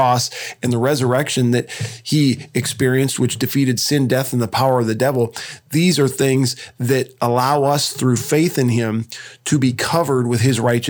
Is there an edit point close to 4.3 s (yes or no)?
no